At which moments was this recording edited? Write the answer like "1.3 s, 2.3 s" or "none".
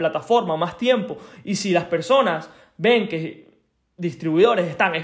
none